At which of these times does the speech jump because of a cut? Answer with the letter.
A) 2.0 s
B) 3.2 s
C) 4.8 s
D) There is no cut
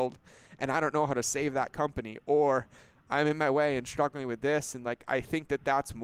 D